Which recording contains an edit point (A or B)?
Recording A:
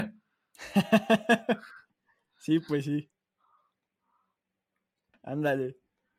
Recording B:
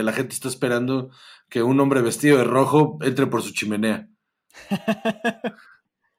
A